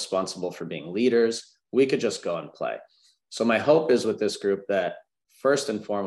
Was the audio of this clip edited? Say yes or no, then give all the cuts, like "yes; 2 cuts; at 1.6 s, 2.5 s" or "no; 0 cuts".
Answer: no; 0 cuts